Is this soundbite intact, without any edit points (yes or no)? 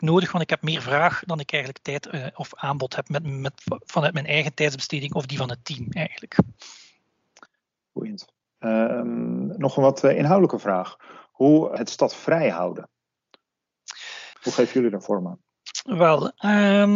no